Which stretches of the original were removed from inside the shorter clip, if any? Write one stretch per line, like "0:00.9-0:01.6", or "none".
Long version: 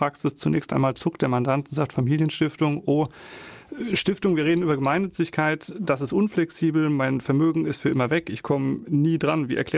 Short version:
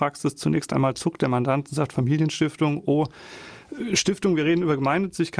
none

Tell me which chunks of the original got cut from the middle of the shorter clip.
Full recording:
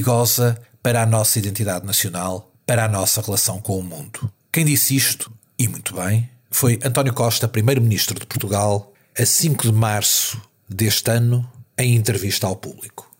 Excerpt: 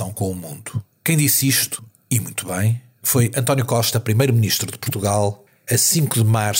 none

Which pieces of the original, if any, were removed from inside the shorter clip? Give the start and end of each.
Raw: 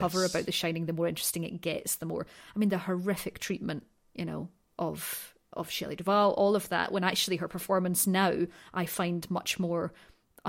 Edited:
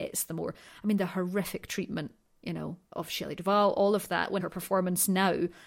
0:04.6-0:05.5
0:07.0-0:07.4

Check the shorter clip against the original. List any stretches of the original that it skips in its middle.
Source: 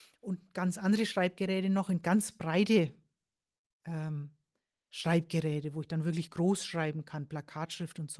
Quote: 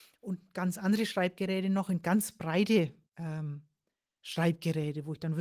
0:03.0-0:03.7

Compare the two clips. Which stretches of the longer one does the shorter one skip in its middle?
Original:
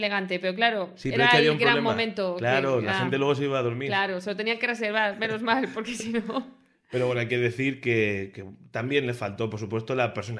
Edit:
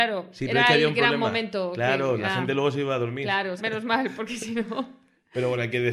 0:04.2-0:05.2

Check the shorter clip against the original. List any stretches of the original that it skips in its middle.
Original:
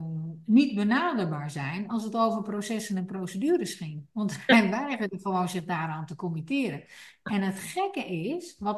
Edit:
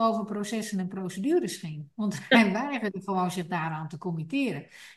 none

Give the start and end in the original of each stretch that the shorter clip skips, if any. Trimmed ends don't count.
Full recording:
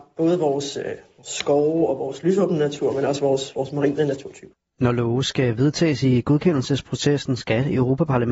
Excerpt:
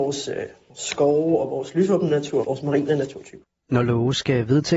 0:02.9-0:03.5

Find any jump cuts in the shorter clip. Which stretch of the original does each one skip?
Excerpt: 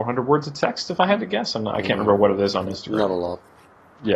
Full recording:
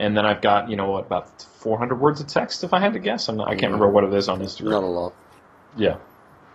none

